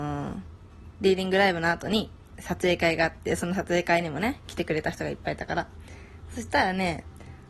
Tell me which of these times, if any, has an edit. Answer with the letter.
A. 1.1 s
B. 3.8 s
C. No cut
C